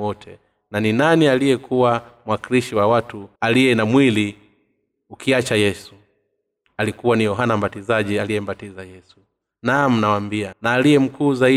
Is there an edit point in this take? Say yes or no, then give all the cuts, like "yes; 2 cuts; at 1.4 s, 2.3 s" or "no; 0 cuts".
yes; 2 cuts; at 3.4 s, 10.5 s